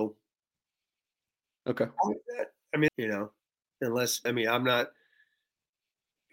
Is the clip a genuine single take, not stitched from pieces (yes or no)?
no